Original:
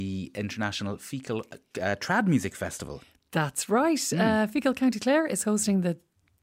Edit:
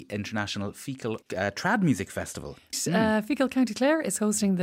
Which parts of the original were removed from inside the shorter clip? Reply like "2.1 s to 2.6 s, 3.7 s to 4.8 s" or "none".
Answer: 1.5 s to 1.7 s, 3.2 s to 4.0 s